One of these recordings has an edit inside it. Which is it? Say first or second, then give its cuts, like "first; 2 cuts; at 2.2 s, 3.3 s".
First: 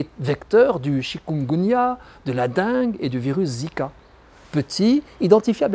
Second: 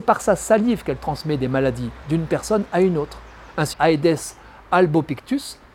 second; 2 cuts; at 2.0 s, 3.7 s